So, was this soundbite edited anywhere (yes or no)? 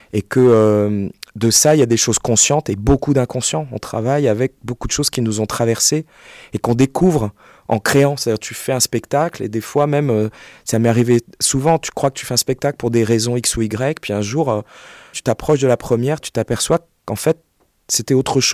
yes